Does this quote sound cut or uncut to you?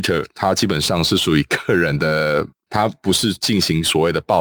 cut